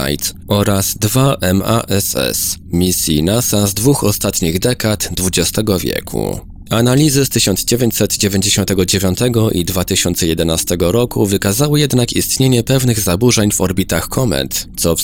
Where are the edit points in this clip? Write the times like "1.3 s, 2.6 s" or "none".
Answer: none